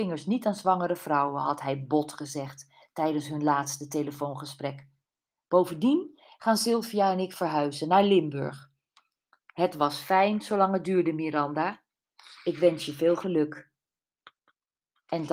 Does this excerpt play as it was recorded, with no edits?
yes; 0 cuts

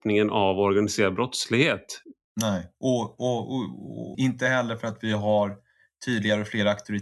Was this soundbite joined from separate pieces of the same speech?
yes; 1 cut; at 4.1 s

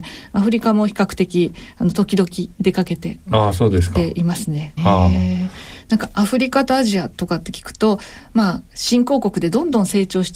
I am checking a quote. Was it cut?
yes; 1 cut; at 4.8 s

